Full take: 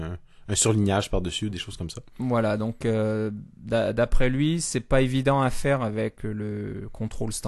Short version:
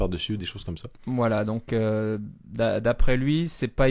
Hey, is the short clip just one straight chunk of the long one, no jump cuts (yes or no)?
yes